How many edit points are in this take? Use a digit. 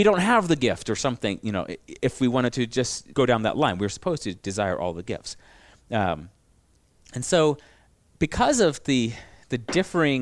1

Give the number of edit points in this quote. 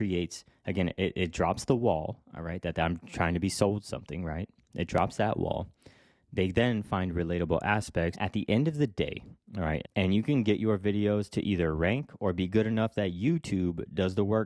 2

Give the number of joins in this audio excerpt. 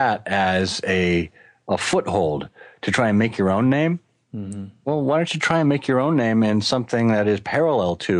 0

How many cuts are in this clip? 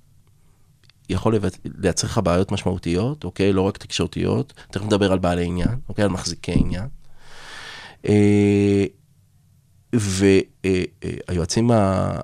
0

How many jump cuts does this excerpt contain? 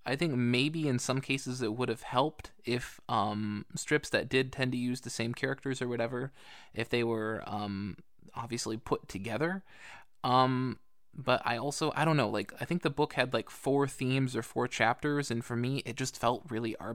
0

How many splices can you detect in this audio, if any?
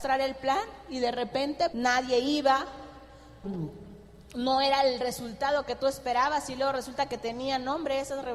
2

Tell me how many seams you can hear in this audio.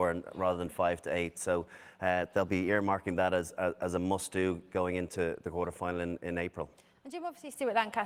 0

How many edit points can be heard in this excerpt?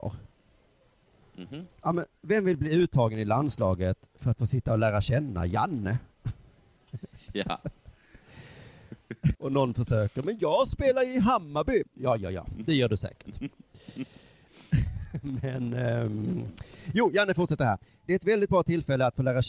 1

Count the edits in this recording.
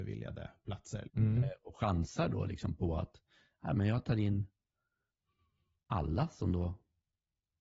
1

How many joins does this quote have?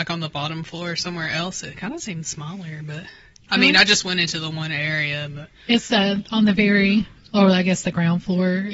0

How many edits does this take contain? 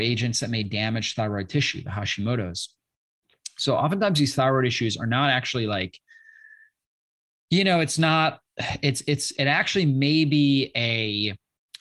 1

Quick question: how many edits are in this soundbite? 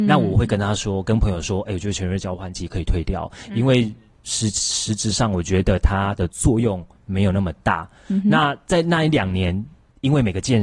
0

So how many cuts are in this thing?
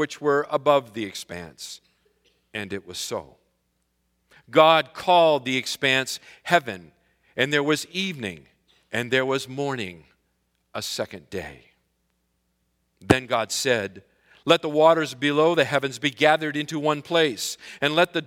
0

